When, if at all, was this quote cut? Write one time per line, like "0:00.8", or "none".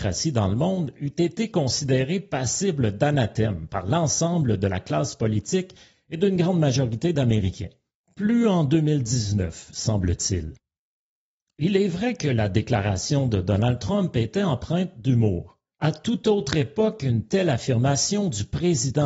0:15.8